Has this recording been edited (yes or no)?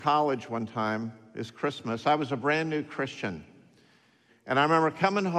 yes